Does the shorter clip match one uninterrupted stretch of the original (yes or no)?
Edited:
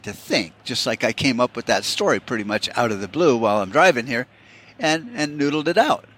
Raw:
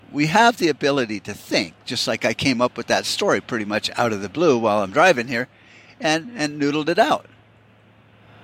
yes